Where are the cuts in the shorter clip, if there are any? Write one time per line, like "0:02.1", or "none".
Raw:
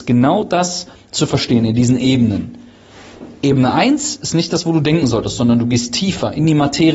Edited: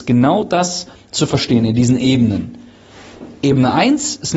none